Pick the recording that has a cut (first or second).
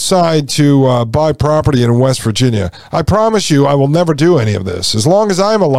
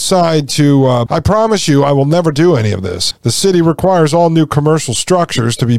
second